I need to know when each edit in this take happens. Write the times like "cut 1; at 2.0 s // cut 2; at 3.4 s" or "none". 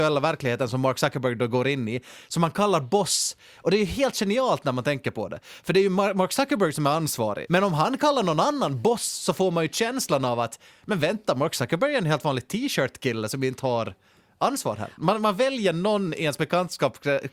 cut 1; at 7.5 s // cut 2; at 15.0 s